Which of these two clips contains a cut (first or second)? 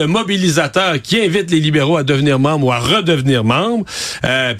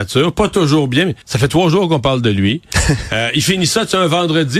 second